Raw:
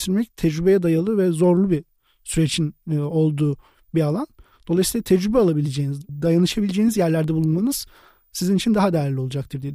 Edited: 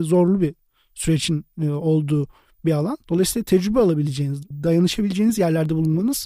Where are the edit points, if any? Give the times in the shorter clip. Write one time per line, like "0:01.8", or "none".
0:03.0

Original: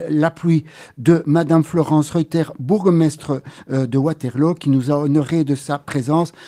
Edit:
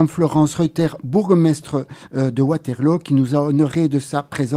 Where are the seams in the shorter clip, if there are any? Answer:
none

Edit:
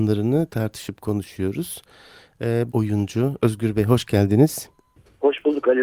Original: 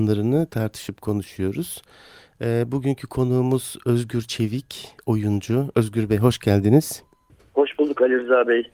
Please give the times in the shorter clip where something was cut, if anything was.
0:02.7

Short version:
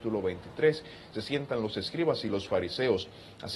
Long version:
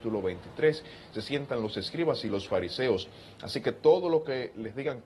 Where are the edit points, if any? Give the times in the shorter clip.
none

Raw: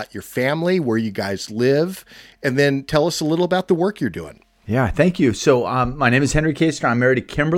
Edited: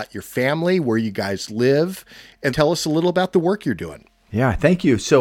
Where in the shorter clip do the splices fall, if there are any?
0:02.5

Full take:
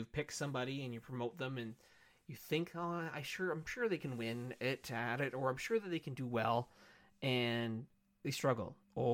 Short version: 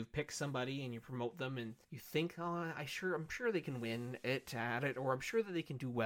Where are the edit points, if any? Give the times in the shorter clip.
0:01.8

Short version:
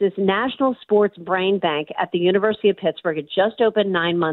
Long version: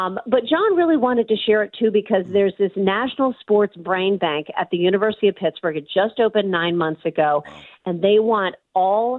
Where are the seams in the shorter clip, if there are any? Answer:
none

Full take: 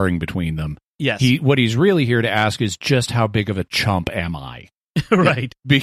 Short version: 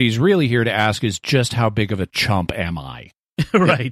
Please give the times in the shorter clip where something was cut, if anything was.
none

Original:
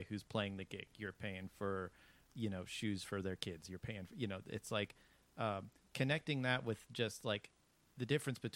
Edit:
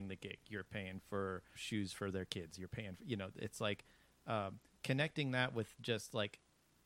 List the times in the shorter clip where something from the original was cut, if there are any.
0:01.6

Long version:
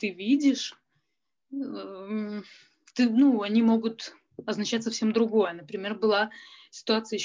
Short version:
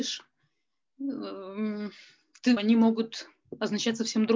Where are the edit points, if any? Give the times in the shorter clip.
0:02.6

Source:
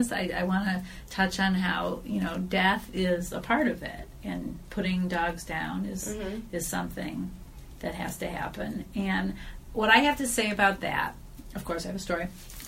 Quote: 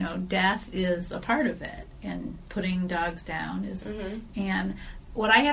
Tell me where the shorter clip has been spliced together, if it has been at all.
0:04.3

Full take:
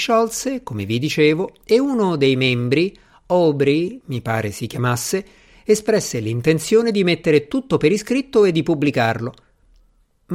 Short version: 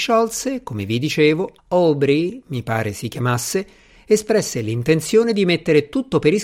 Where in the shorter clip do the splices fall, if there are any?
0:01.6

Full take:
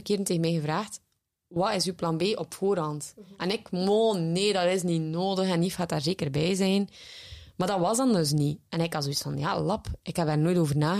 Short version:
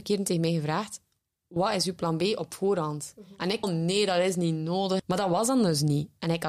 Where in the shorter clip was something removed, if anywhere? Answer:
0:03.6
0:05.0

